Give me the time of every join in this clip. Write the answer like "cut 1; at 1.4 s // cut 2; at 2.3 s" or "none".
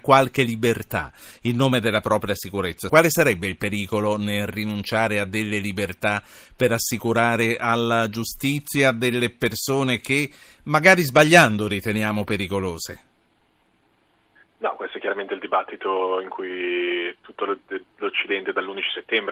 cut 1; at 2.9 s